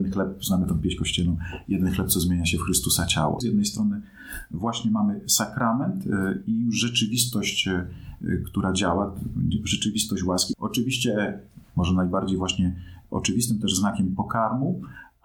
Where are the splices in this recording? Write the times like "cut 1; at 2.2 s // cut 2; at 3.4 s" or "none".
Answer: cut 1; at 3.4 s // cut 2; at 10.5 s // cut 3; at 11.7 s